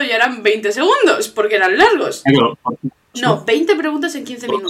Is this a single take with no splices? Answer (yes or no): no